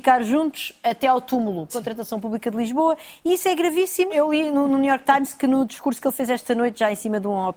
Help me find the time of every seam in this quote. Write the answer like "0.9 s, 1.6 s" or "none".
1.7 s, 4.1 s